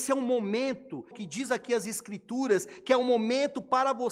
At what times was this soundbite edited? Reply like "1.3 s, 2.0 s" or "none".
1.1 s